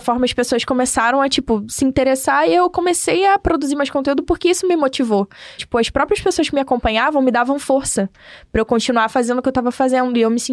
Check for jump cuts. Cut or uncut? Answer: cut